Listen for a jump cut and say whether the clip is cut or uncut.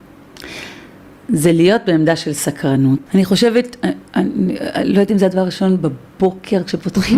cut